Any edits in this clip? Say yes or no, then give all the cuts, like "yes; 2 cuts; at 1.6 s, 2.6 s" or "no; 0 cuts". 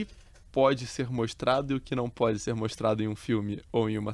no; 0 cuts